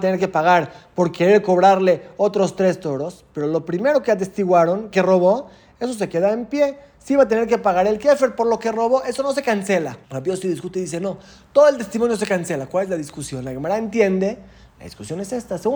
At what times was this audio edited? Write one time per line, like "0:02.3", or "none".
0:10.0